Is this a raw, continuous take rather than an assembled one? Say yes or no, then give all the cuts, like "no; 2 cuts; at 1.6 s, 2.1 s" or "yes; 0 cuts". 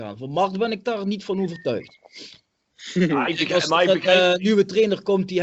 yes; 0 cuts